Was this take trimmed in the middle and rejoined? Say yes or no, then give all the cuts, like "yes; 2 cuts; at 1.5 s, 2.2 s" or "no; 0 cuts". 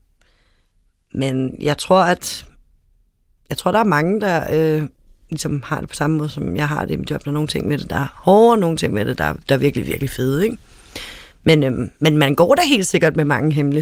no; 0 cuts